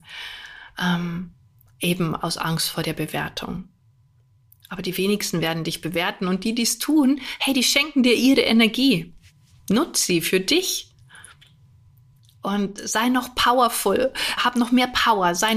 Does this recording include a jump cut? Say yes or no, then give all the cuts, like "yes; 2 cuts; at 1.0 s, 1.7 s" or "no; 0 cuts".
yes; 1 cut; at 14.4 s